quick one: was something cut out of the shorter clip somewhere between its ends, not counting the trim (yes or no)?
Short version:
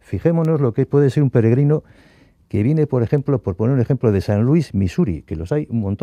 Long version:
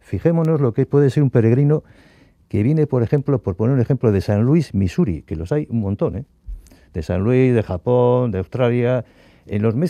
no